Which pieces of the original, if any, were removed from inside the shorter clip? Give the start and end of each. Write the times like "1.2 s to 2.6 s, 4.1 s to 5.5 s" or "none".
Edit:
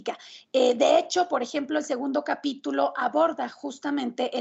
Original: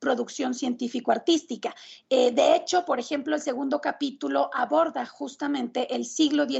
none